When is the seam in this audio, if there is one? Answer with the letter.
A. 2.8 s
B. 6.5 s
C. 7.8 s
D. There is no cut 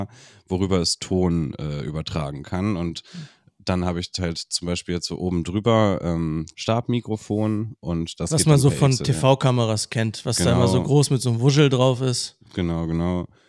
B